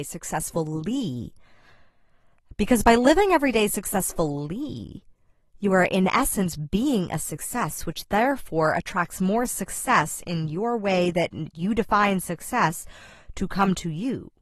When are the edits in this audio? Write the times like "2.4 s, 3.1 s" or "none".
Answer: none

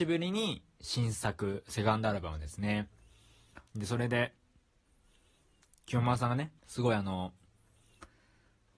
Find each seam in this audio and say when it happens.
3.7 s, 6.6 s

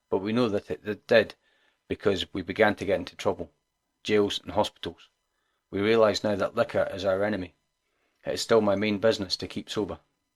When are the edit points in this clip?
none

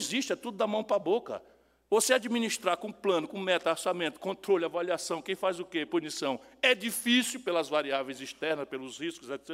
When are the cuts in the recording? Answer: 5.9 s

